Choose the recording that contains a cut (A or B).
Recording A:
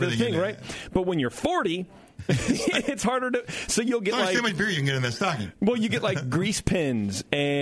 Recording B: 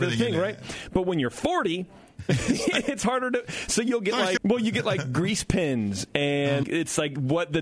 B